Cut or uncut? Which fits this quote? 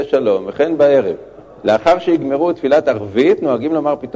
uncut